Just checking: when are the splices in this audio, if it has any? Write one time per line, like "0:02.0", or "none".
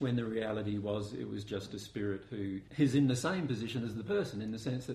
0:02.7